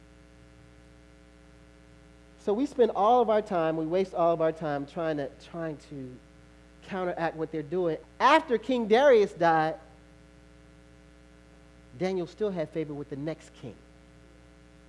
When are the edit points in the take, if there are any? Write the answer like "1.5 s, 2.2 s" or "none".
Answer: 8.0 s